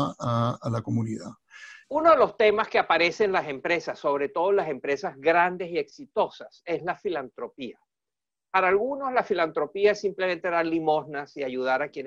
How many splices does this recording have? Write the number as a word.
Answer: one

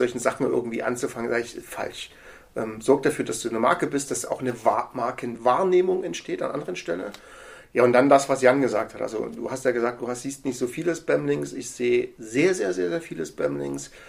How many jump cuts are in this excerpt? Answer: zero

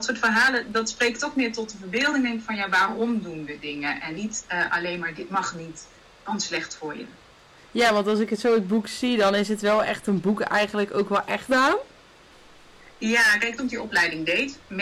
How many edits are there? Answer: two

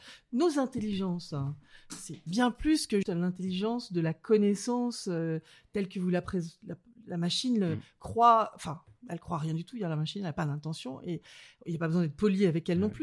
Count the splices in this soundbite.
one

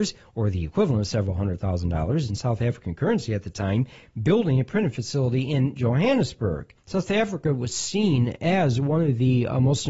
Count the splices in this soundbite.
one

